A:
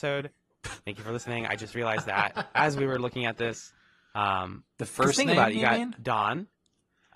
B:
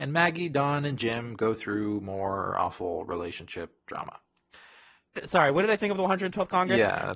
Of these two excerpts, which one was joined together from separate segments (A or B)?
B